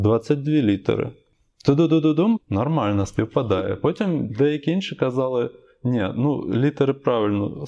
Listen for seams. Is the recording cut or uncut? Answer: uncut